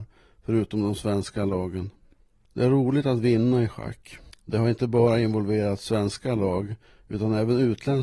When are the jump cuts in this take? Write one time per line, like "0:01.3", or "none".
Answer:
0:04.3